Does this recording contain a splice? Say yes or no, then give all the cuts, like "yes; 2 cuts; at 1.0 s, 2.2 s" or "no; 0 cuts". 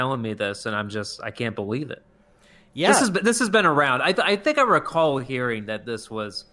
no; 0 cuts